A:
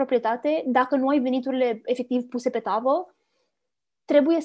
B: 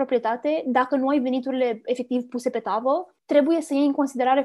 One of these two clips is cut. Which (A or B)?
B